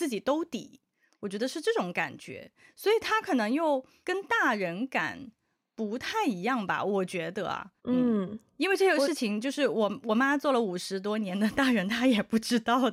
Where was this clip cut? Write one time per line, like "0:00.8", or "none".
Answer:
0:07.8